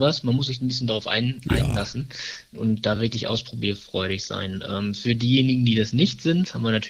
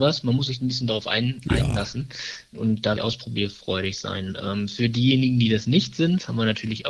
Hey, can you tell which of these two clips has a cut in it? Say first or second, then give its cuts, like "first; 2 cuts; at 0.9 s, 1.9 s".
second; 1 cut; at 3.0 s